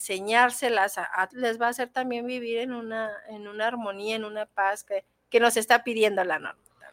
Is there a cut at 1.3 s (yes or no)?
yes